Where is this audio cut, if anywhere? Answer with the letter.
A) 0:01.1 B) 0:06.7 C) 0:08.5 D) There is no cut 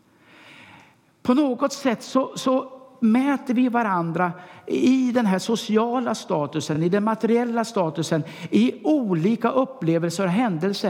D